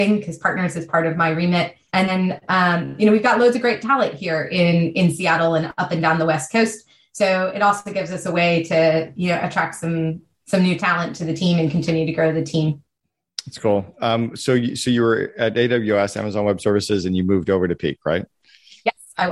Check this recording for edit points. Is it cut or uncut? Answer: cut